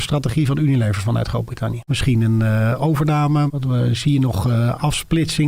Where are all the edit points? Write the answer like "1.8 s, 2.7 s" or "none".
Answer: 1.9 s, 3.5 s